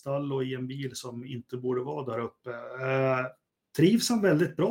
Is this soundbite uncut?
yes; 0 cuts

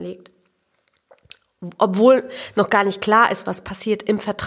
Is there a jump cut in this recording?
no; 0 cuts

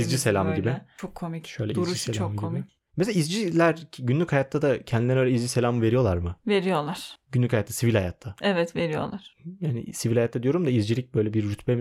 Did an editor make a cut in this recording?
no; 0 cuts

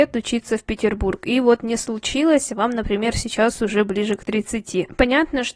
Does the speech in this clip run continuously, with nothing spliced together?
yes; 0 cuts

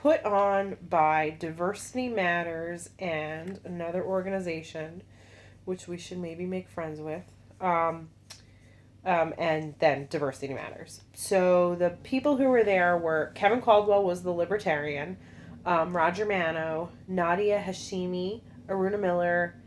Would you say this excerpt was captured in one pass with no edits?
no; 2 cuts; at 8.9 s, 11.1 s

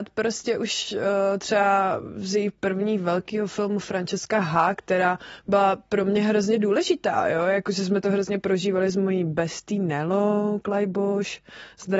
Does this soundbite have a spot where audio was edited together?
no; 0 cuts

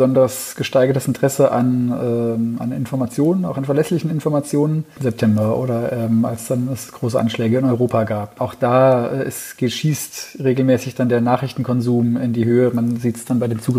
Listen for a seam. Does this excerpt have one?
yes; 1 cut; at 5.0 s

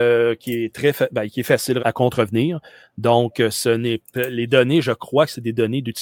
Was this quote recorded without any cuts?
no; 1 cut; at 1.8 s

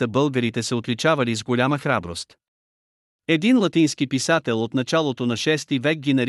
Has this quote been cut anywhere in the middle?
no; 0 cuts

